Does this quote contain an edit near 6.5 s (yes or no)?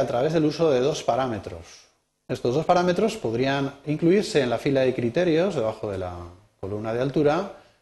no